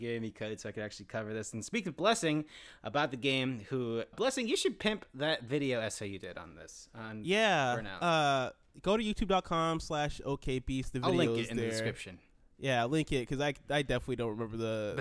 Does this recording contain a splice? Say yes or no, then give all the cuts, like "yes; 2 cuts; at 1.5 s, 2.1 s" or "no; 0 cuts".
yes; 1 cut; at 4.1 s